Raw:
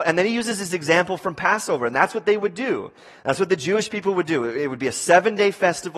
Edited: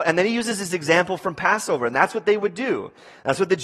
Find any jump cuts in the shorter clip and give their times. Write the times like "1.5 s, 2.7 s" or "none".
none

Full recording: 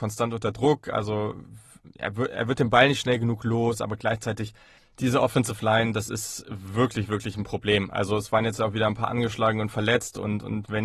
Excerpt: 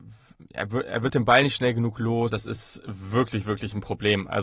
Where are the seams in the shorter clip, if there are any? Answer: 2.3 s

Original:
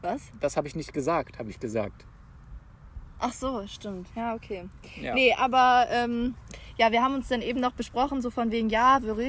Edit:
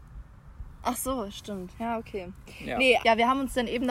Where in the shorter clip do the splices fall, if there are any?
3.0 s

